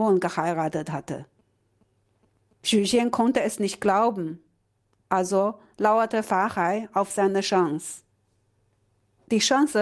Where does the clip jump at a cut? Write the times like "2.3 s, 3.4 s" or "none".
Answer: none